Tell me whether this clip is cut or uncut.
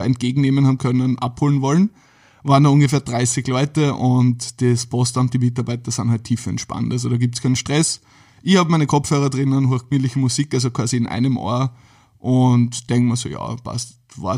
uncut